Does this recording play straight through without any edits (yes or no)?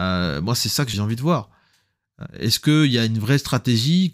no